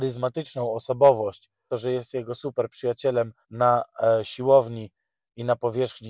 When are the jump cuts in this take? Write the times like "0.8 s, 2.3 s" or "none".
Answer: 1.7 s, 3.4 s